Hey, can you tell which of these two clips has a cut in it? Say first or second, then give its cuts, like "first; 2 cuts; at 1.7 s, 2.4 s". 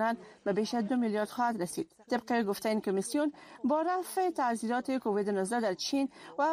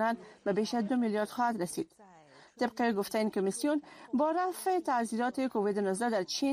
first; 1 cut; at 2.0 s